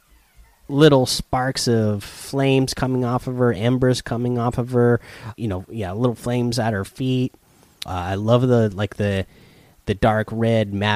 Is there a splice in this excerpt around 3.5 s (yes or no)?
no